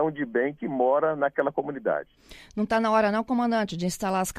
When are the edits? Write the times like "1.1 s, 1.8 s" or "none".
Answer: none